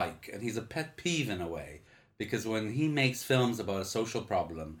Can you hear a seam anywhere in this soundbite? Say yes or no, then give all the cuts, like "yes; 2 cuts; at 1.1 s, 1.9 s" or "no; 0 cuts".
no; 0 cuts